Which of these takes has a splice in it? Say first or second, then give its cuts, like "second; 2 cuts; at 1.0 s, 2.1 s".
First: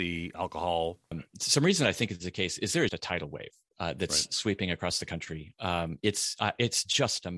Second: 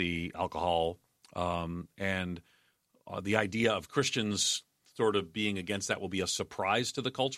first; 2 cuts; at 1.1 s, 2.9 s